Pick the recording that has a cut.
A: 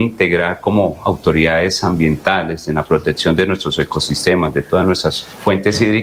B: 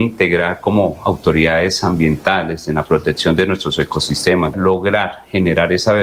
B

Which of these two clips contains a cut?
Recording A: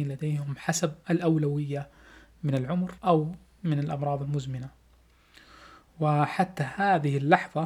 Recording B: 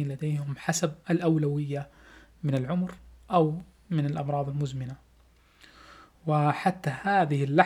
A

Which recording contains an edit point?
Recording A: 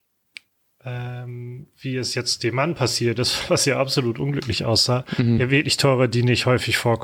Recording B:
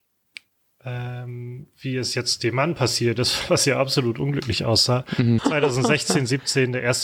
B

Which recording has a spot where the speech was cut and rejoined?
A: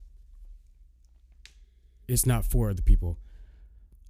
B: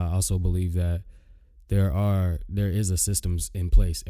A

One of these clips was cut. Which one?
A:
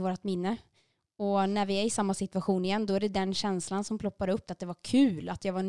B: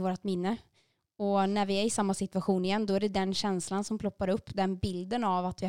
A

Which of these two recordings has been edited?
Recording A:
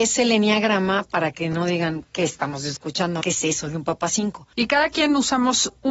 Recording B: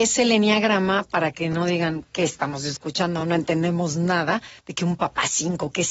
A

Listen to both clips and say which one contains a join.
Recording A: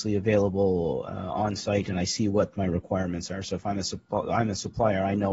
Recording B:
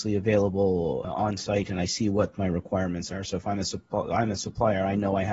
B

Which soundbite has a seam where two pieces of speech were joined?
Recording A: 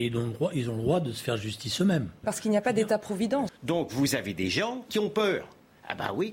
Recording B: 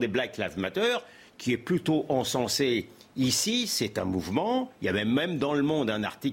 A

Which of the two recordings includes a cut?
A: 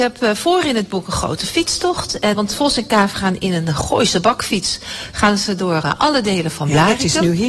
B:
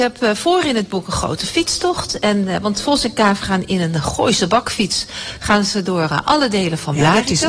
A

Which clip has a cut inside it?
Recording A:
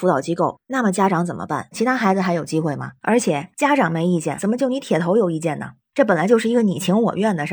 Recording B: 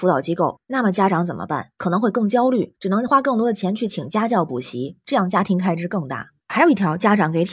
A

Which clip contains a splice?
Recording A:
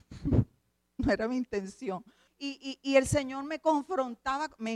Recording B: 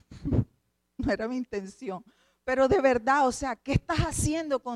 A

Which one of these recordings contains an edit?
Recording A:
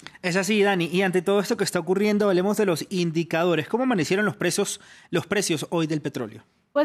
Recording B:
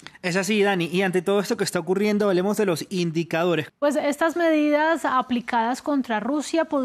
B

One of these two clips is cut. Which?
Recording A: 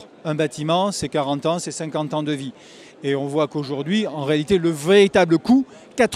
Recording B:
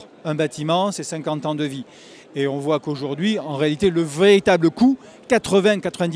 B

